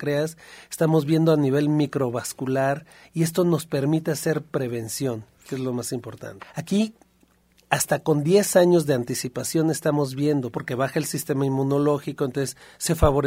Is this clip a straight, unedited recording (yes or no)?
no